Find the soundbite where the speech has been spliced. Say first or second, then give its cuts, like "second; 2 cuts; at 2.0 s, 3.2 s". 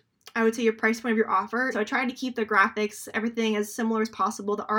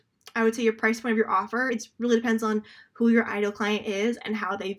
first; 1 cut; at 1.7 s